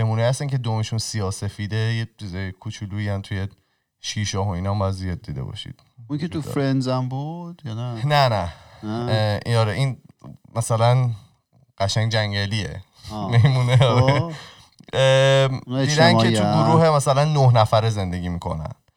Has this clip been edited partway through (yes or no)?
no